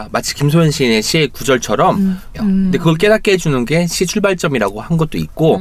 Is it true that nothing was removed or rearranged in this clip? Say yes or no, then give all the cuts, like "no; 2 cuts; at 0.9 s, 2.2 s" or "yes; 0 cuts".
no; 1 cut; at 2.3 s